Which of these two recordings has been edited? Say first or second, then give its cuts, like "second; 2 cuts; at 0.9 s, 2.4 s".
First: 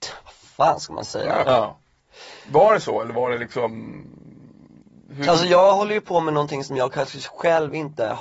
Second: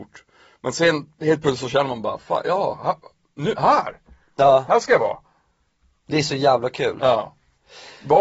first; 1 cut; at 1.4 s